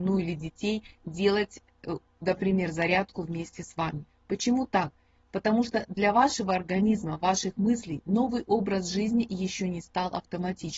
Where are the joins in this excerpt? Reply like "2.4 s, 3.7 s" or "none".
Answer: none

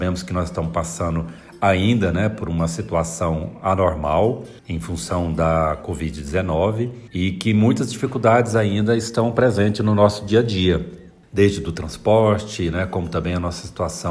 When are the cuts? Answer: none

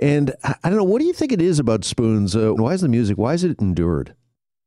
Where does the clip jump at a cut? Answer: 2.6 s

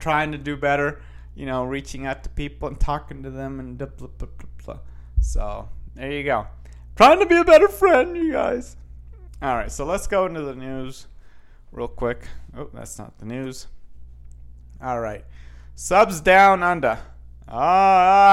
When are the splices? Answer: none

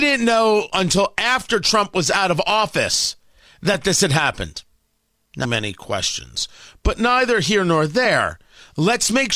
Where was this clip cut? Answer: 5.4 s

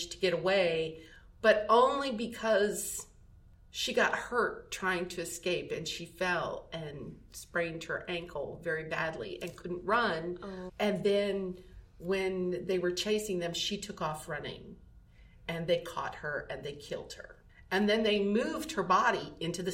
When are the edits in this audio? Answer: 10.7 s

